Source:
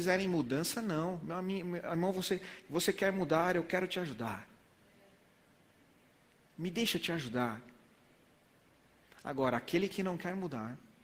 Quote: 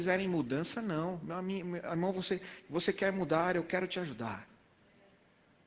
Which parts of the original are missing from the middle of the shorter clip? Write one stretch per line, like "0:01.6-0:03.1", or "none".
none